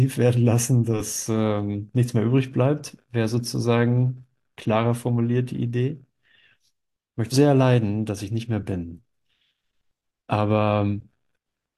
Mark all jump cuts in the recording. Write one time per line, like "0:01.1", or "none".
0:07.3